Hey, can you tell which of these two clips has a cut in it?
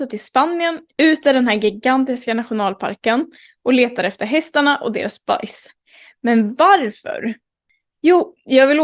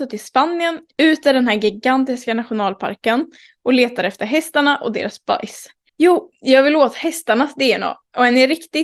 second; 1 cut; at 5.9 s

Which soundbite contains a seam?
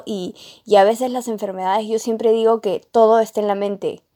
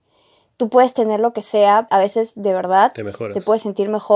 second; 1 cut; at 1.9 s

